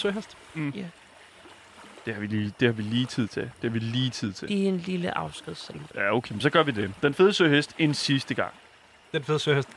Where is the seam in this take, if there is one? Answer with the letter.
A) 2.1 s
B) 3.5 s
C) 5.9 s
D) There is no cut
B